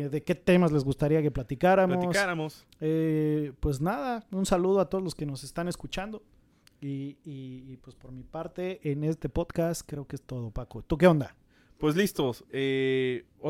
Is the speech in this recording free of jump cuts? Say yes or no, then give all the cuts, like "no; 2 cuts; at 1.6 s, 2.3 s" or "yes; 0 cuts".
yes; 0 cuts